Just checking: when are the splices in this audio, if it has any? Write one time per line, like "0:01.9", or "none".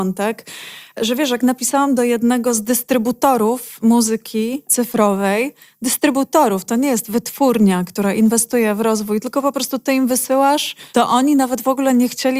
0:10.9